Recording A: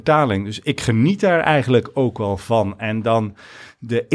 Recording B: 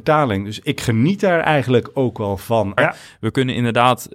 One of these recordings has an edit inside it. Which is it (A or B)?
B